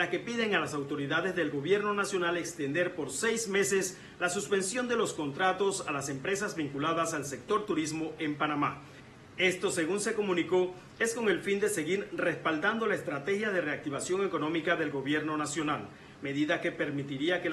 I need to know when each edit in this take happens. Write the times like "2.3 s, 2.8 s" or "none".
none